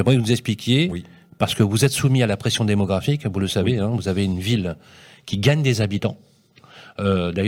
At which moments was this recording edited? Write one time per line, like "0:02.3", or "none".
none